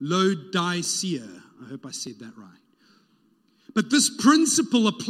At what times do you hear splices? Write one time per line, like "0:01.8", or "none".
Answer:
none